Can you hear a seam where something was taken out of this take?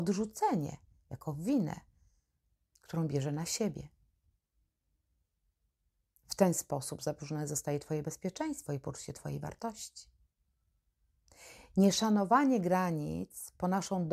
no; 0 cuts

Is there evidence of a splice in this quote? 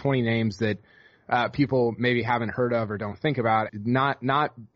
yes; 1 cut; at 3.7 s

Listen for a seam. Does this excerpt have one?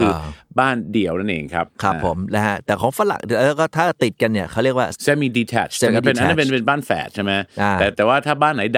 yes; 1 cut; at 4.9 s

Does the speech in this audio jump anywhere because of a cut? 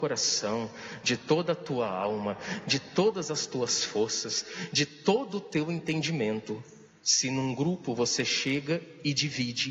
no; 0 cuts

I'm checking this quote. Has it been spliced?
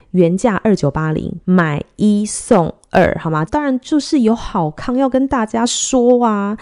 yes; 2 cuts; at 1.4 s, 3.5 s

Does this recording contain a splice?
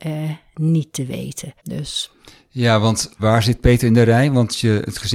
yes; 2 cuts; at 1.6 s, 3.2 s

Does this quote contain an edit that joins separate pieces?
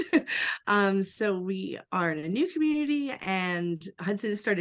no; 0 cuts

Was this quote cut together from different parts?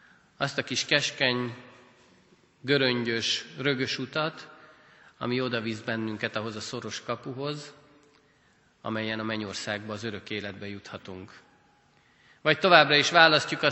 no; 0 cuts

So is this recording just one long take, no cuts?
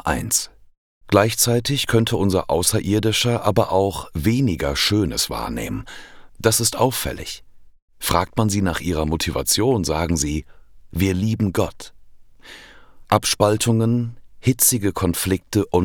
no; 2 cuts; at 6.3 s, 13.0 s

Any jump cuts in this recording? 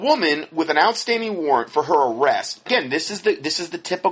yes; 1 cut; at 2.7 s

